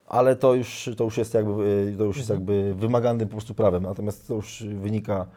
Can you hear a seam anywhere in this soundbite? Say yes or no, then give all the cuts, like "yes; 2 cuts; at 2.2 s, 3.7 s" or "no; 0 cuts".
no; 0 cuts